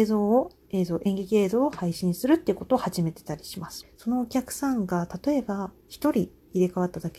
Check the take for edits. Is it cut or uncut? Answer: cut